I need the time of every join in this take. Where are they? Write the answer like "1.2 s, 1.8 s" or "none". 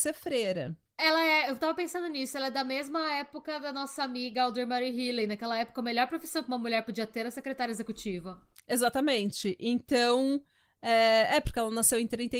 1.0 s